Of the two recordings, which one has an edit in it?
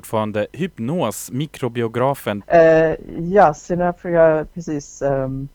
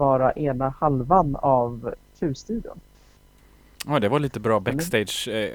first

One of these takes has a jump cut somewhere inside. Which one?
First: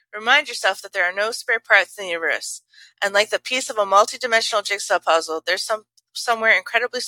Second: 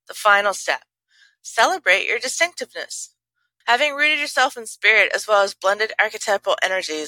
second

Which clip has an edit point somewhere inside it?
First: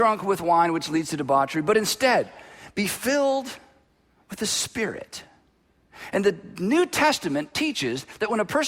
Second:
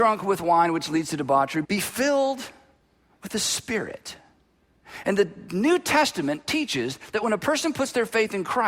second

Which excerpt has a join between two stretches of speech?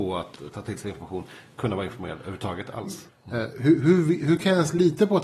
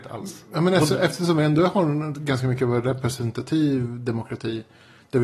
first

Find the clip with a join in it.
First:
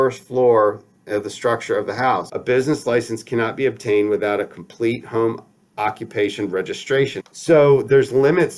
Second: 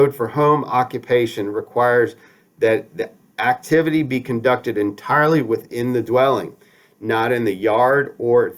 first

